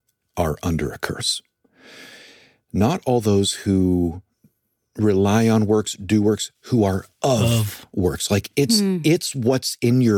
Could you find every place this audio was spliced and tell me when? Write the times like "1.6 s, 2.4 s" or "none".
none